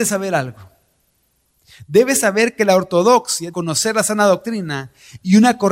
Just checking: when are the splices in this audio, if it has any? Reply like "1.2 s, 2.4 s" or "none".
3.5 s